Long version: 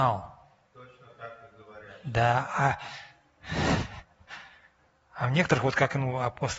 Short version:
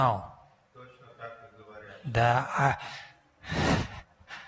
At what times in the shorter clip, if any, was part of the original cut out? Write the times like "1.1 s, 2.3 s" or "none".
none